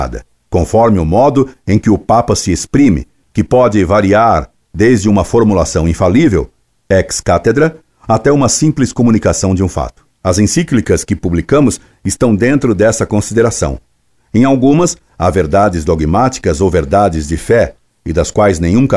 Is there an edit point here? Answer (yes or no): no